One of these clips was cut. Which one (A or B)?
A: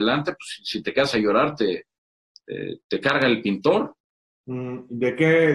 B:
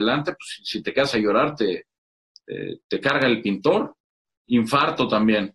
B